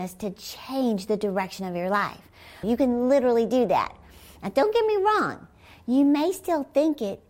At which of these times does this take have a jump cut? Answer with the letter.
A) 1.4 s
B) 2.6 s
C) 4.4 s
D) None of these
B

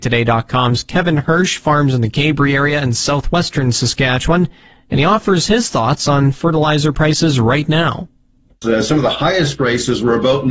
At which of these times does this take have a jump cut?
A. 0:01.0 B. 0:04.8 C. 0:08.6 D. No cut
C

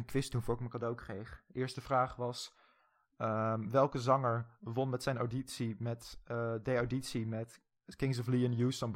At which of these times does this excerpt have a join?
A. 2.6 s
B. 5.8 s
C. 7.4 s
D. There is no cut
D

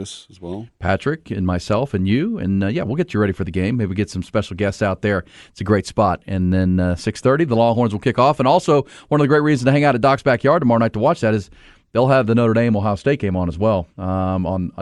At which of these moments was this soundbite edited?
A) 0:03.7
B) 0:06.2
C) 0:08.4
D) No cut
D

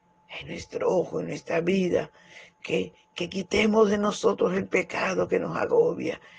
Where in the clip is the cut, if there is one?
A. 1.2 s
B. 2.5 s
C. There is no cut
C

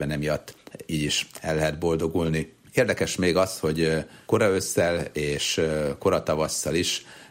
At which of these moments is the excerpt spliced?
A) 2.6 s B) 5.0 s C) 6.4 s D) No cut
D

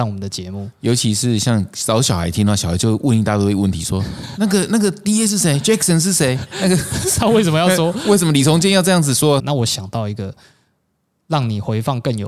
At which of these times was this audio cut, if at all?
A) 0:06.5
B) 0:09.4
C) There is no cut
B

